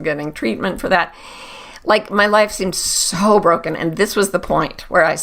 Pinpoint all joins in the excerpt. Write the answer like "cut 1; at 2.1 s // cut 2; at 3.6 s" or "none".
none